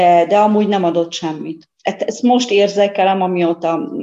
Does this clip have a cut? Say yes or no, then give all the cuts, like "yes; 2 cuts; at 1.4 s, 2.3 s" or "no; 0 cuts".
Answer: yes; 1 cut; at 1.7 s